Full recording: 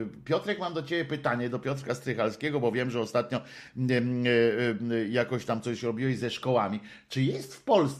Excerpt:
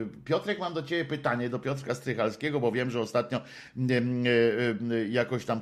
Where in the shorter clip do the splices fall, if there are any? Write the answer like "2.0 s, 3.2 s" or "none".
none

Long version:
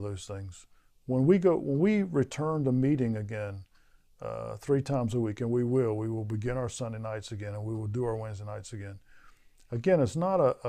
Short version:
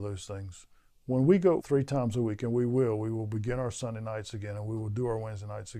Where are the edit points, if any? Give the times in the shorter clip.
1.6 s

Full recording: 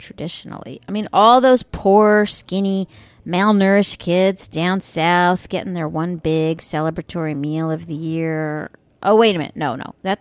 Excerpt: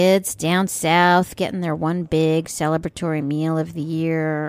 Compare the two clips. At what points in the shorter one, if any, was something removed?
none

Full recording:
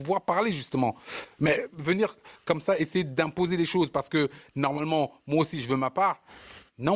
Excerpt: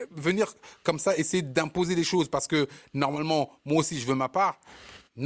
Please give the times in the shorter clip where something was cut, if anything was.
none

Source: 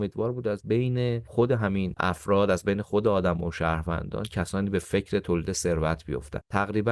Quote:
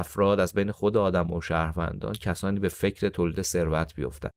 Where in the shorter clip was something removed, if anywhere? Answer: none

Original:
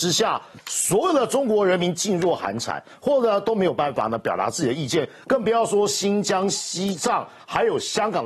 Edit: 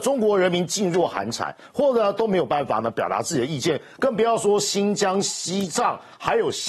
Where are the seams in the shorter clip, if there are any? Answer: none

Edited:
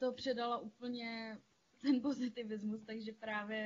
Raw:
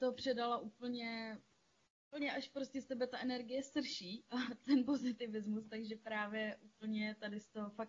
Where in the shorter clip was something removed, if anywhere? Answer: 1.7 s

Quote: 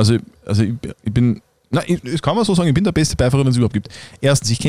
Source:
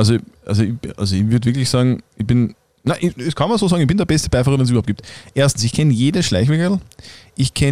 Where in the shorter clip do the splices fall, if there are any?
0.9 s

